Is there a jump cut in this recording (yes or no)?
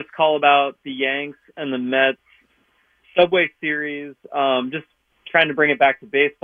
no